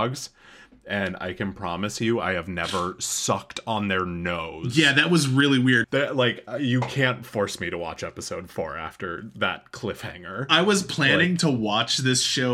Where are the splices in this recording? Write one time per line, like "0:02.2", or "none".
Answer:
0:05.8

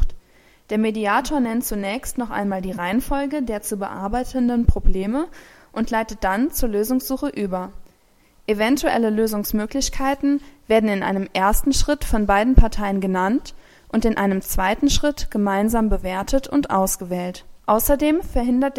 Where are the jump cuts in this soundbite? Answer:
0:17.6

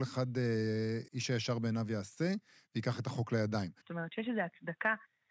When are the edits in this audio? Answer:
0:01.1
0:03.8

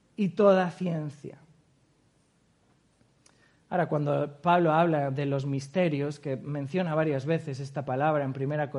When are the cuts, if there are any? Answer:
none

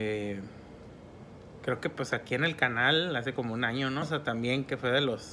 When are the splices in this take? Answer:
0:04.0

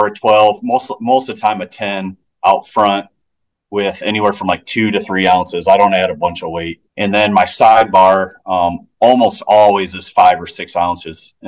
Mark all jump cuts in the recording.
0:06.9

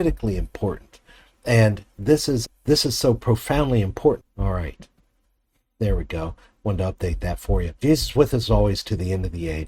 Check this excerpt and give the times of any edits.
0:02.4
0:04.2
0:07.8

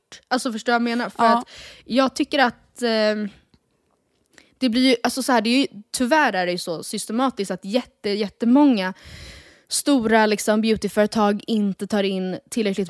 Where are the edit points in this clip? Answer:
none

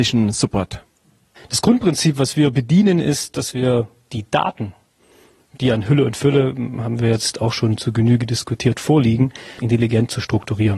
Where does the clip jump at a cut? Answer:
0:09.6

